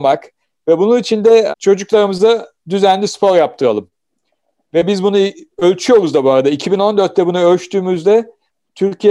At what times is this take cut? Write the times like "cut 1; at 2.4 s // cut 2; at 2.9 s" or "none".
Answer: cut 1; at 1.5 s